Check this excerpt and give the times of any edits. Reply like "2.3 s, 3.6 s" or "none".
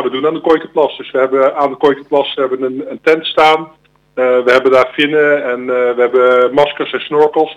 none

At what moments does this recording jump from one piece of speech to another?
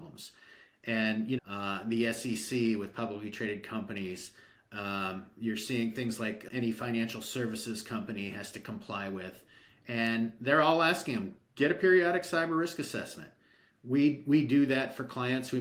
1.4 s, 6.5 s

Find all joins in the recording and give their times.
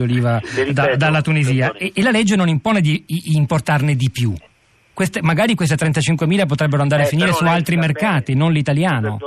none

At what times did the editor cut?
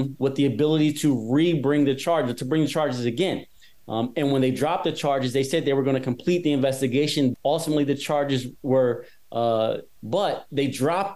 7.3 s, 10.0 s

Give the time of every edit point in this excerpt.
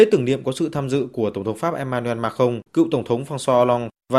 2.7 s

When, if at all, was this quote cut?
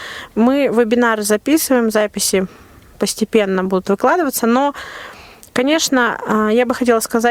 none

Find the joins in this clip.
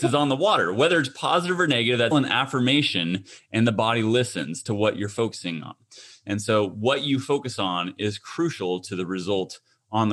2.1 s

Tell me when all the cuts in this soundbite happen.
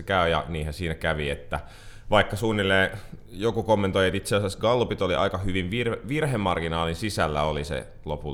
none

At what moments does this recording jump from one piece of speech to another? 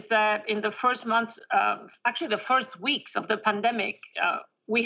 none

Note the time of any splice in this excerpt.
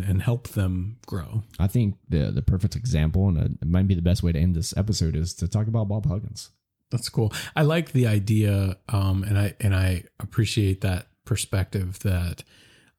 6.8 s

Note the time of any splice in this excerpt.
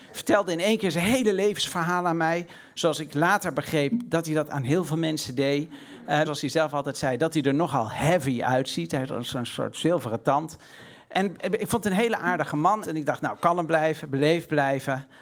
6.2 s, 12.8 s

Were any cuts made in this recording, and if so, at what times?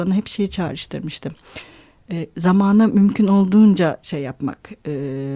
none

